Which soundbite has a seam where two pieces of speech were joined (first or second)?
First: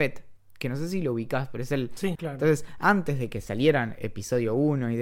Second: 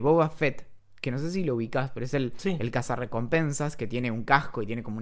first